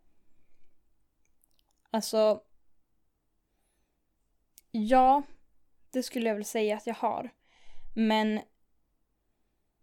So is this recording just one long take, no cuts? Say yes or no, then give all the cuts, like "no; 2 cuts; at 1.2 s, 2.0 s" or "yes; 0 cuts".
yes; 0 cuts